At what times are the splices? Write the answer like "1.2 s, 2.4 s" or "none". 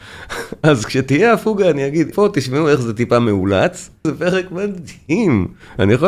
2.1 s, 4.0 s